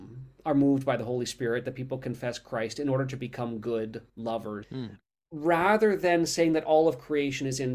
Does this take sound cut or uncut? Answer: cut